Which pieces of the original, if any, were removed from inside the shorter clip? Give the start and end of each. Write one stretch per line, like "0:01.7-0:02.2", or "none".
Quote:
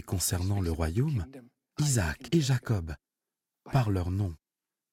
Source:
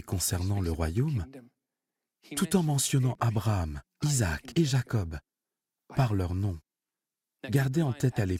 0:01.7-0:03.9

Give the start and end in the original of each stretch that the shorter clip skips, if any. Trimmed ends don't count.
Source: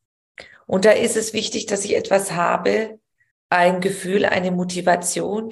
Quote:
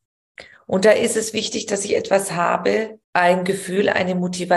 0:03.0-0:03.4

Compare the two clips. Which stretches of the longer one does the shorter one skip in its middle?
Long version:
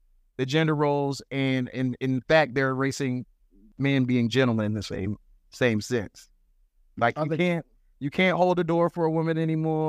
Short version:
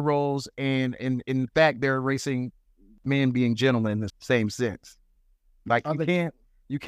0:04.8-0:05.4

